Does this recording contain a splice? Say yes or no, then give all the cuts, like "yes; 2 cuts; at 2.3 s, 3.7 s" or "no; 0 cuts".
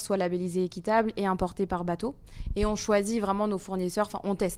no; 0 cuts